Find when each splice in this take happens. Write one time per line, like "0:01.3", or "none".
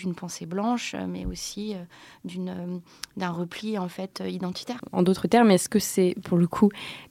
none

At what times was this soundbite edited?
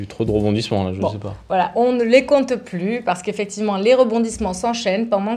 0:01.7

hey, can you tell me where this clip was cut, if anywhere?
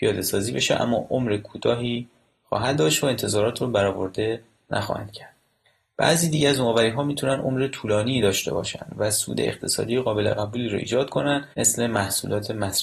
0:11.5

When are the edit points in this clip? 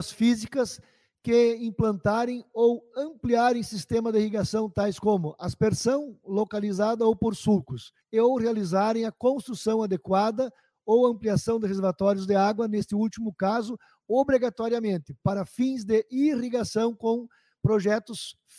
0:08.0

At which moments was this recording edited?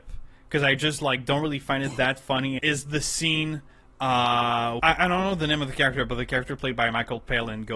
0:02.6
0:04.8

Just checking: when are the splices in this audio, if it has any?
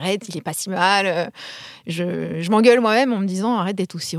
none

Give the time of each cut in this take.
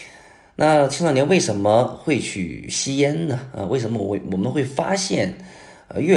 none

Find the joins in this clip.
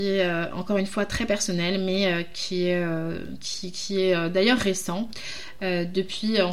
none

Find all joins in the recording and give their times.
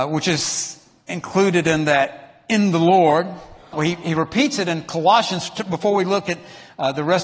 0:03.7

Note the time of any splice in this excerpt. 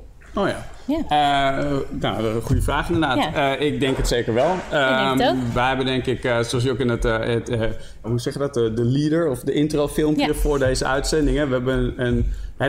0:08.0

